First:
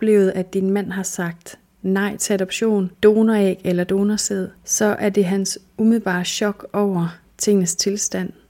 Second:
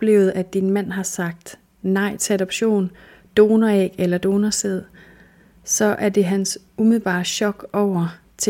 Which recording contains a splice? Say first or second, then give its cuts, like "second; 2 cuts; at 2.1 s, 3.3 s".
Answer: first; 2 cuts; at 2.9 s, 4.6 s